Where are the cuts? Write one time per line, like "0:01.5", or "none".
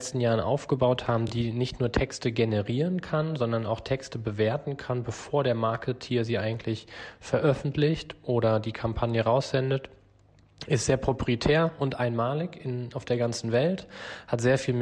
none